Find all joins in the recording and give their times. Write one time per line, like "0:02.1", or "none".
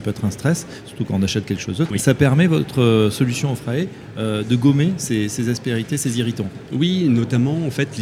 0:01.9